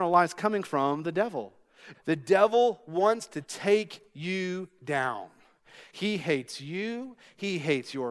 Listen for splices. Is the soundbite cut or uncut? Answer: cut